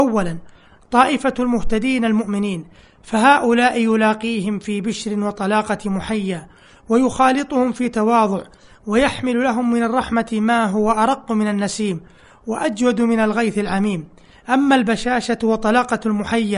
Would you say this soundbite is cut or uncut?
uncut